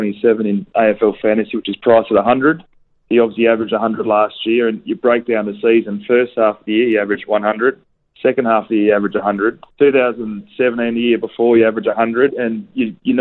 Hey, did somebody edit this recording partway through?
yes; 2 cuts; at 9.7 s, 12.3 s

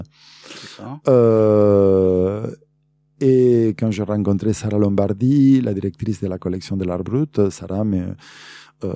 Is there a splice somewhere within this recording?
no; 0 cuts

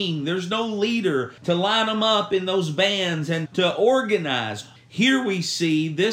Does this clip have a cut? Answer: yes; 3 cuts; at 1.4 s, 3.5 s, 4.8 s

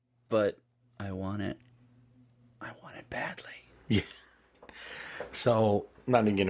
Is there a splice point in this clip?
no; 0 cuts

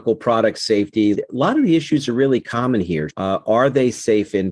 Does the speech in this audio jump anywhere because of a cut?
yes; 2 cuts; at 1.1 s, 3.1 s

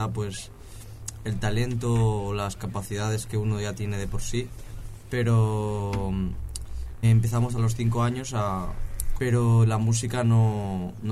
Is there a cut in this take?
yes; 2 cuts; at 7.0 s, 9.2 s

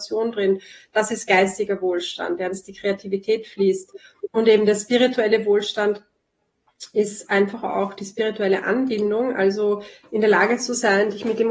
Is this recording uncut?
yes; 0 cuts

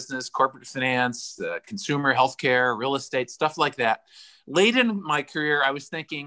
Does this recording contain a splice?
no; 0 cuts

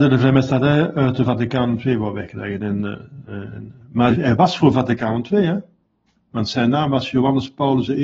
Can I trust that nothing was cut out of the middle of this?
no; 1 cut; at 4.1 s

